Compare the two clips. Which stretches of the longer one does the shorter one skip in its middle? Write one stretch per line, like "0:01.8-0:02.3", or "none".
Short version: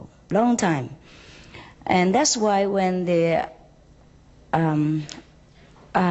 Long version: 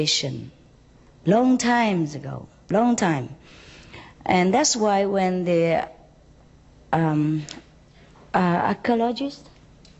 none